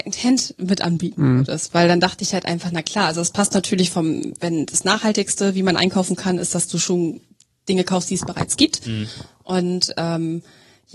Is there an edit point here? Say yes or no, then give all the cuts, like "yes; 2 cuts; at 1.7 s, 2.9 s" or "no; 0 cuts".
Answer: no; 0 cuts